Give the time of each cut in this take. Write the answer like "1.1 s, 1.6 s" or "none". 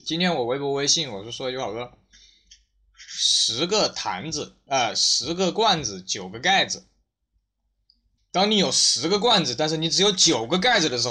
8.2 s